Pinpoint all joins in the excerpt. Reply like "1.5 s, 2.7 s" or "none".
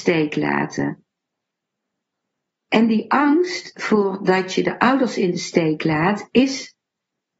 none